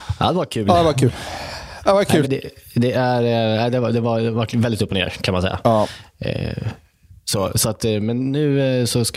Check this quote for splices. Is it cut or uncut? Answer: cut